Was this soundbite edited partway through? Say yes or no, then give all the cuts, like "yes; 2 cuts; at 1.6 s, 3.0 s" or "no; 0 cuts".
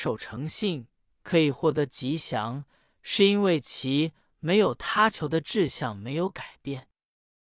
no; 0 cuts